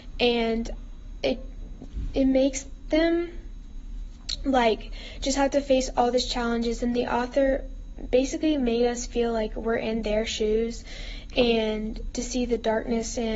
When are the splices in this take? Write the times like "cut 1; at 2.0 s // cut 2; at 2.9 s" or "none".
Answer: none